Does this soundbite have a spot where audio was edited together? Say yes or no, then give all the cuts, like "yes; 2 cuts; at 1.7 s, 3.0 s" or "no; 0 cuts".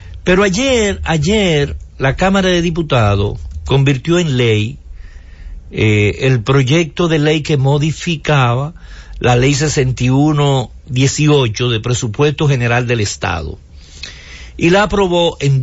no; 0 cuts